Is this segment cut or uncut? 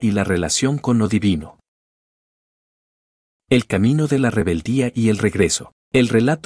uncut